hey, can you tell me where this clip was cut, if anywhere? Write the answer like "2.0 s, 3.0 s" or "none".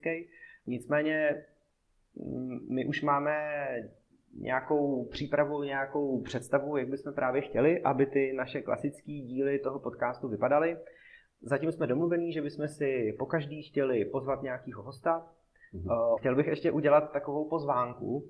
16.2 s

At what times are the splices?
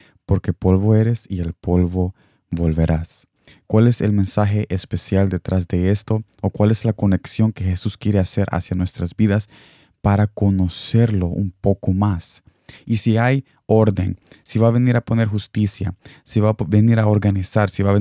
12.8 s

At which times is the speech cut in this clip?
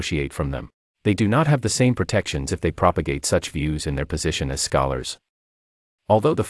0.9 s

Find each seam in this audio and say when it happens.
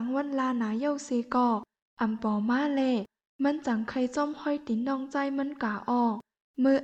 2.2 s

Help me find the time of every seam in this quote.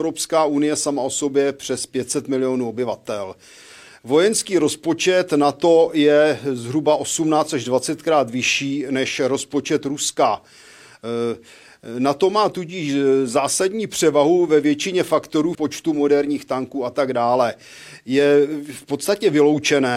15.5 s

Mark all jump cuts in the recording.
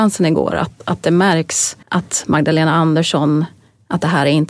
1.8 s

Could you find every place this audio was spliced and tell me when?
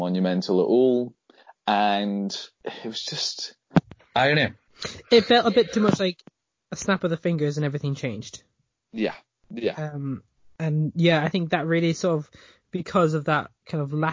none

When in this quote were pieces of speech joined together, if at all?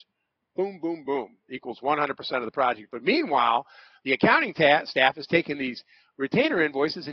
1.1 s

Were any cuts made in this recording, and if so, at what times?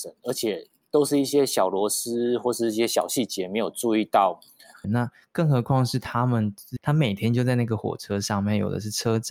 4.8 s, 6.8 s

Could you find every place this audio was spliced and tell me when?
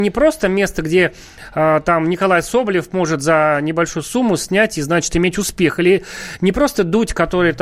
none

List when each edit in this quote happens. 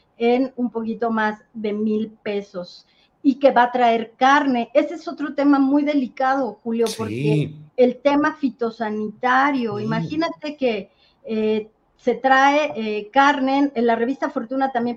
7.7 s

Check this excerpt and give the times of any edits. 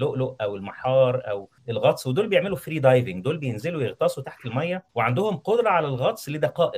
1.6 s, 4.9 s

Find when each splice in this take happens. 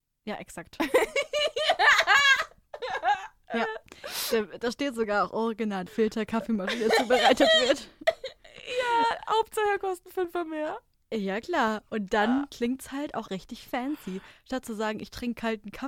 5.9 s, 13.3 s

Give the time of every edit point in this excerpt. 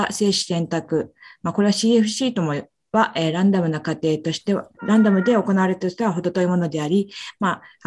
2.9 s, 4.8 s

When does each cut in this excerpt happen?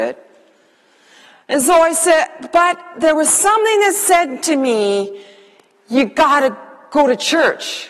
none

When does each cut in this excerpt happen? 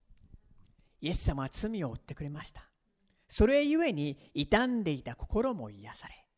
none

